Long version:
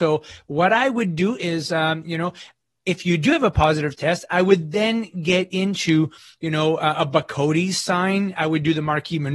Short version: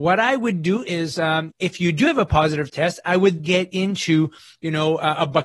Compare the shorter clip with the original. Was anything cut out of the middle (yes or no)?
yes